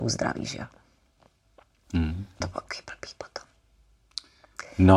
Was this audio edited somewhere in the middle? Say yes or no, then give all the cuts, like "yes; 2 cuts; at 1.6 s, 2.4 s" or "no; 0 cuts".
yes; 1 cut; at 2.4 s